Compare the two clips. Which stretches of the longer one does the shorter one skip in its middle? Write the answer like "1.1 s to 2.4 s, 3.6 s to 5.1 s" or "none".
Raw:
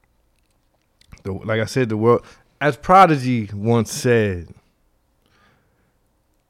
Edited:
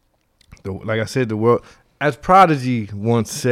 none